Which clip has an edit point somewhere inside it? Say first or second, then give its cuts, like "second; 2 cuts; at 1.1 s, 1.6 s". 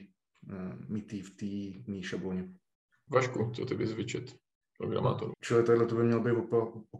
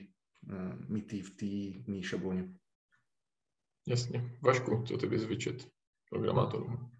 first; 2 cuts; at 3.1 s, 5.3 s